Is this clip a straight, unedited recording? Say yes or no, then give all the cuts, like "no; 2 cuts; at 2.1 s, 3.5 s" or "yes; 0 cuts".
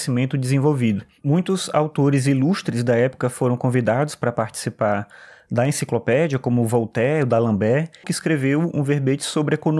no; 1 cut; at 8.0 s